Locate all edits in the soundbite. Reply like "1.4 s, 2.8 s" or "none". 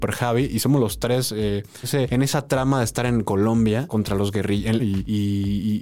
1.8 s, 4.8 s